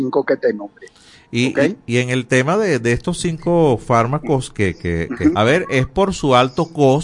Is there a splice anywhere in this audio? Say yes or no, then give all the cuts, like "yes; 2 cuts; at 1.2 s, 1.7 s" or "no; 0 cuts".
yes; 1 cut; at 5.3 s